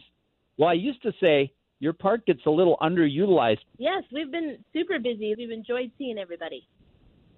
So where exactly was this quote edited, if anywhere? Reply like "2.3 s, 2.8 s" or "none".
3.7 s, 5.3 s